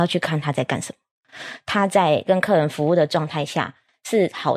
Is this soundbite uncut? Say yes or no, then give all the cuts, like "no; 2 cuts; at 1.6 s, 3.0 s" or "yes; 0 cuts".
yes; 0 cuts